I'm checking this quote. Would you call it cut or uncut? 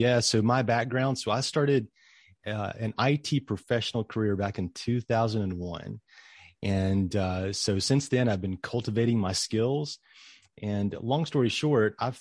uncut